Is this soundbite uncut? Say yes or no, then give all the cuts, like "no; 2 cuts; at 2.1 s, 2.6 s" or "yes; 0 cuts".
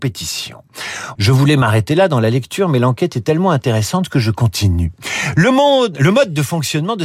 no; 1 cut; at 1.2 s